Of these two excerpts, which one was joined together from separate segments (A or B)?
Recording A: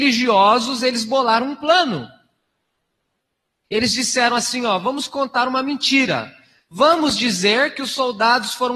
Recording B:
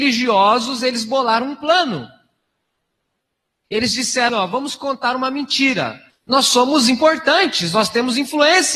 B